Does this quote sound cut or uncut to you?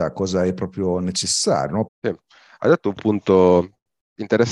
cut